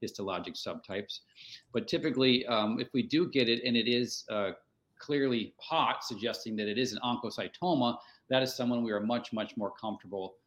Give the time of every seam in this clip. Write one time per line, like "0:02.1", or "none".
0:05.6